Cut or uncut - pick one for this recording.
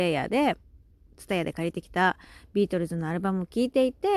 cut